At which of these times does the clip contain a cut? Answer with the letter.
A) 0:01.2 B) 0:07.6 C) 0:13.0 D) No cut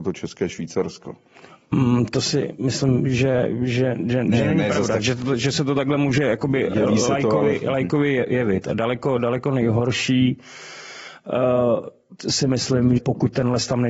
C